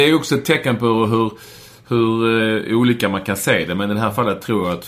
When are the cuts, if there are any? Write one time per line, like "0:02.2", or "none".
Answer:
none

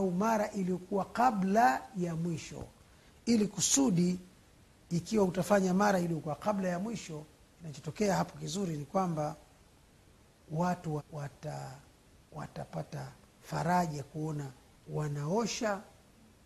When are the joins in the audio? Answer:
0:11.0

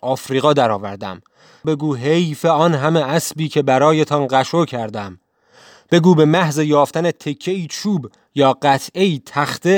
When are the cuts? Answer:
none

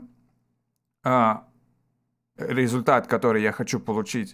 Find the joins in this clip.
0:02.4

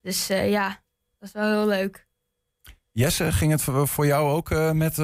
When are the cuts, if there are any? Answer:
none

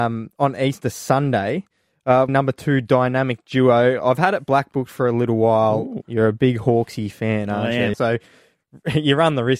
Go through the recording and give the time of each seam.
0:02.3
0:06.0
0:07.9

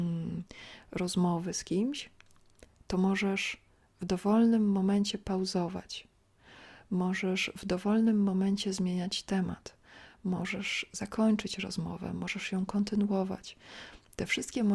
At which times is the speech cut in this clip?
none

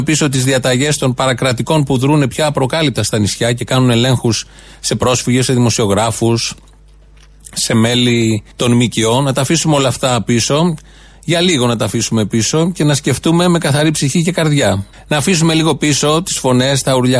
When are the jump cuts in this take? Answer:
0:08.5
0:14.9

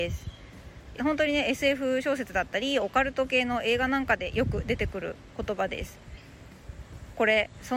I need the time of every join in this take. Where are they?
0:01.0

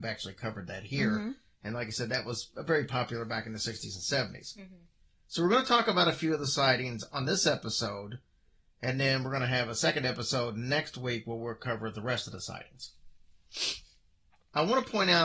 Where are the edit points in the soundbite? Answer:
none

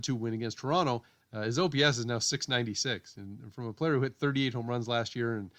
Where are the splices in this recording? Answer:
0:01.2

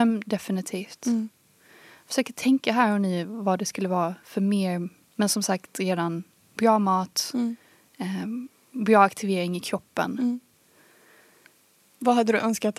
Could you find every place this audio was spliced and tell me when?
none

